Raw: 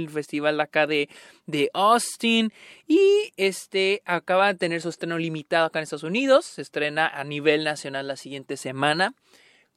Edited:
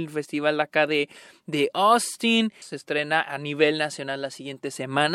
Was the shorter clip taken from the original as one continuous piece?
no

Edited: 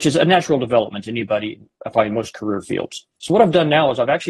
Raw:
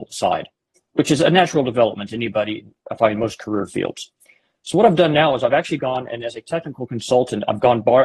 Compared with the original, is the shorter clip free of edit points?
no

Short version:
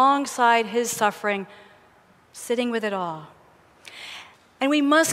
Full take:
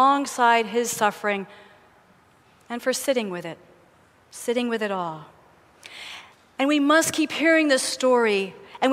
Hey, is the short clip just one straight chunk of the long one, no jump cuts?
no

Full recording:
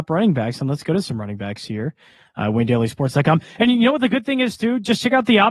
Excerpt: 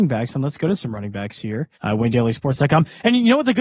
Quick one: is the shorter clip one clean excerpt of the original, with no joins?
no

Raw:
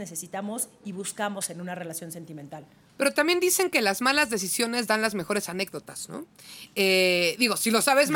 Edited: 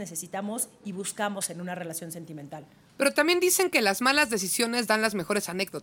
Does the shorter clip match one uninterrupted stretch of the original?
yes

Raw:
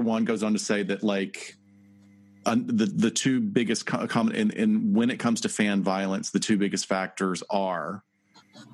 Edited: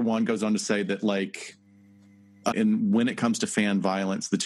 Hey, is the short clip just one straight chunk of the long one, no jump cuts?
no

